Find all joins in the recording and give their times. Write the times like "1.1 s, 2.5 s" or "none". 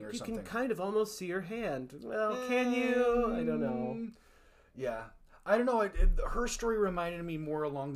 none